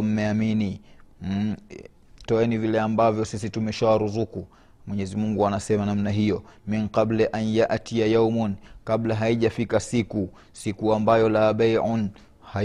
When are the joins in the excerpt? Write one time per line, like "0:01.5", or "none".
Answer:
0:02.3